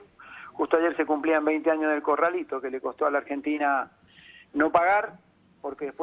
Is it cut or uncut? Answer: uncut